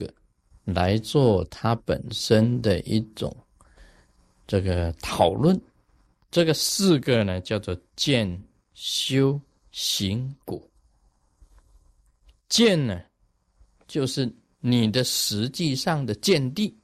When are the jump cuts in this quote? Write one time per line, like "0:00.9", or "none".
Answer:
none